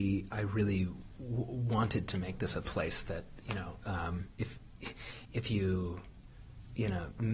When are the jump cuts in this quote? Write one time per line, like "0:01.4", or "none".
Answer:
0:05.2